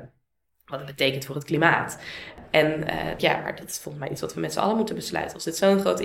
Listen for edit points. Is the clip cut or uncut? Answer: cut